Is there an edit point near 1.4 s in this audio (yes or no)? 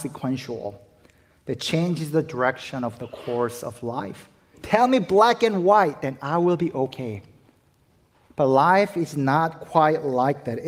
no